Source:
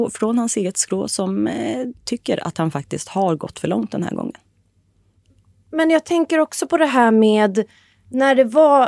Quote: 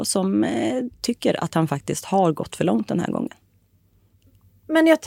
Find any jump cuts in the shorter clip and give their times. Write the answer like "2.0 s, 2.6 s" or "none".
none